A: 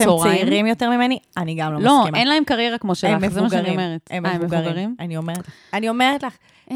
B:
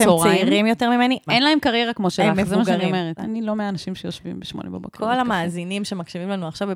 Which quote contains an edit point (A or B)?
B